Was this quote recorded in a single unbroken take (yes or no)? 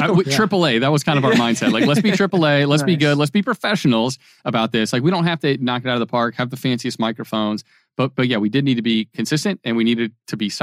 yes